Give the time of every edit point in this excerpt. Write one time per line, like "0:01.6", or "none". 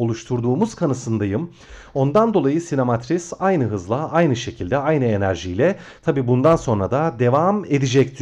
none